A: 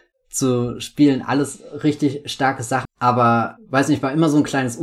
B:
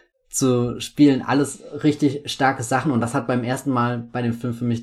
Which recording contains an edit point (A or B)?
A